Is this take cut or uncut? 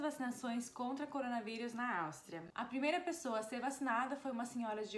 uncut